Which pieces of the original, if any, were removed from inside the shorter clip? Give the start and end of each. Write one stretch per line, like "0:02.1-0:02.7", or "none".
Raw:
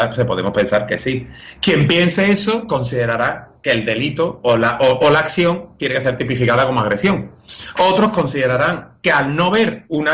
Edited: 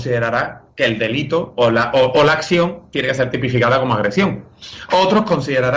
none